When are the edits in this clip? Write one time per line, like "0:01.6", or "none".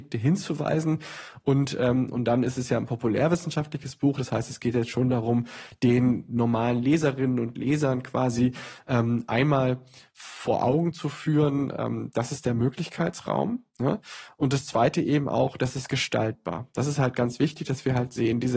none